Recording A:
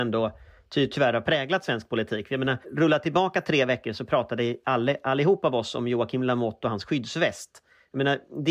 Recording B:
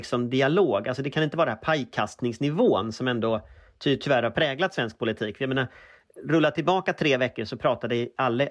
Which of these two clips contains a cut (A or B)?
A